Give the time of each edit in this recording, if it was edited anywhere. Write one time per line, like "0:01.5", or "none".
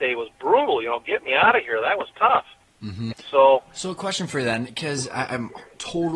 0:03.1